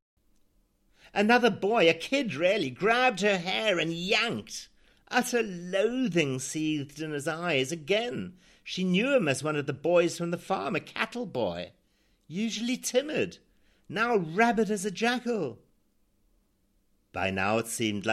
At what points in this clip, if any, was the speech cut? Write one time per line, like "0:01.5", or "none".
none